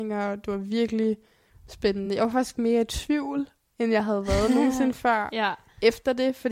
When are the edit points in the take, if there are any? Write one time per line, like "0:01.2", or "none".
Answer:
none